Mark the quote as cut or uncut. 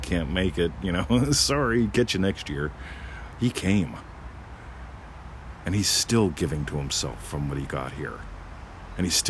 uncut